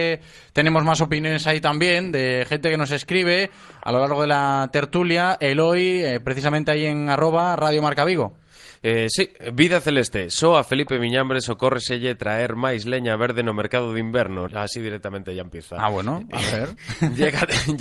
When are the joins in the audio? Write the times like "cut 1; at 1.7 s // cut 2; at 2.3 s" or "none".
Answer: cut 1; at 14.5 s